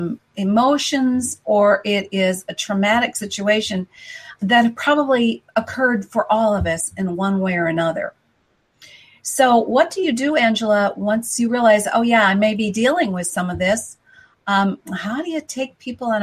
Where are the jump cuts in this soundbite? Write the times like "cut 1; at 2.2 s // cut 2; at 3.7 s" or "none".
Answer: cut 1; at 4.4 s